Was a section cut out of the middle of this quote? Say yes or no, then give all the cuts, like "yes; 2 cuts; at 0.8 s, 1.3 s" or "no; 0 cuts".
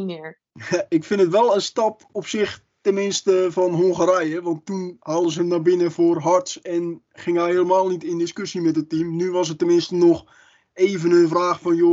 no; 0 cuts